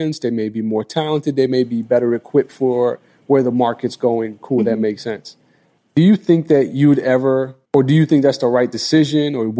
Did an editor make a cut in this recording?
yes; 2 cuts; at 5.8 s, 7.6 s

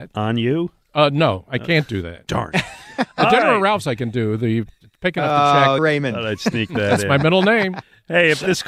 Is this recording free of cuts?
no; 1 cut; at 5.8 s

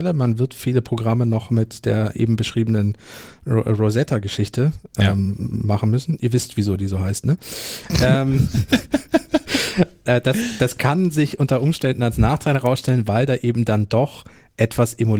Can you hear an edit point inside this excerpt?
no; 0 cuts

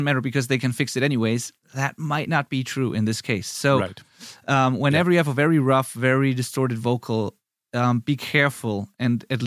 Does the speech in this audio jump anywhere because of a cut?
no; 0 cuts

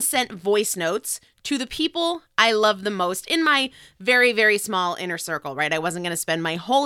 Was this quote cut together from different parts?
no; 0 cuts

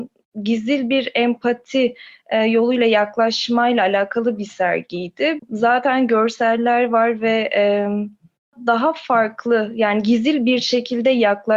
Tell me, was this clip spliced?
yes; 1 cut; at 5.4 s

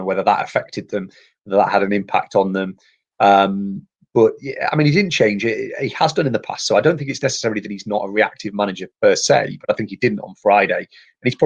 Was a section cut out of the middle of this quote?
no; 0 cuts

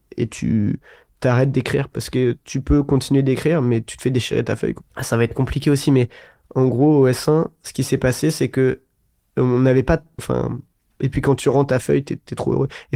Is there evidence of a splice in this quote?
yes; 2 cuts; at 4.8 s, 10.2 s

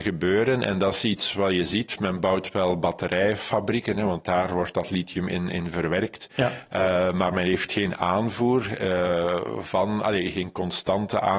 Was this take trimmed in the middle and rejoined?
no; 0 cuts

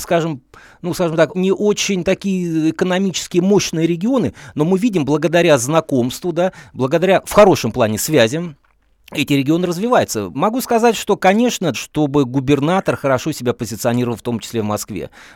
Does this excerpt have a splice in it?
yes; 3 cuts; at 1.3 s, 10.3 s, 11.7 s

